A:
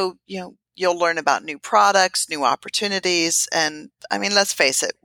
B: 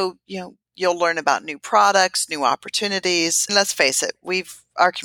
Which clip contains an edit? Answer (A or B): B